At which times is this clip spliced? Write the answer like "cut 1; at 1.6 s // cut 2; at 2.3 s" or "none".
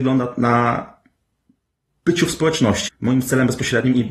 cut 1; at 2.9 s